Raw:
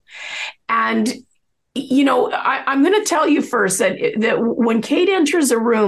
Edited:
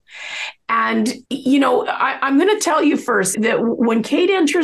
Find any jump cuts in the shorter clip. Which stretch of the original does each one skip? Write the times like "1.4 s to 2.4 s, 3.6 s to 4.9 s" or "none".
1.2 s to 1.7 s, 3.8 s to 4.1 s